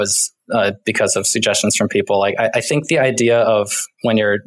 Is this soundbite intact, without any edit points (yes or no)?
yes